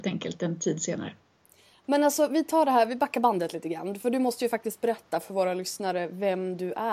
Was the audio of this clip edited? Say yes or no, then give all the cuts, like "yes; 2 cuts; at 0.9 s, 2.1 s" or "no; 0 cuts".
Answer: no; 0 cuts